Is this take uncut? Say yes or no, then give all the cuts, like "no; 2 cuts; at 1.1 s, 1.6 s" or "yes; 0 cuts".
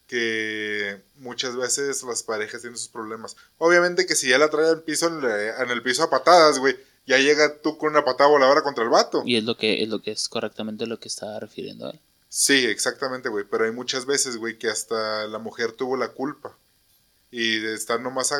yes; 0 cuts